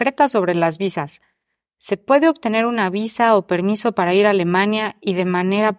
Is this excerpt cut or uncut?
uncut